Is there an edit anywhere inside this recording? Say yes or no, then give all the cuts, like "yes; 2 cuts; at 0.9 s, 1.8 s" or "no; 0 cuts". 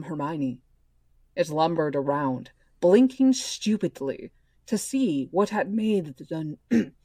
no; 0 cuts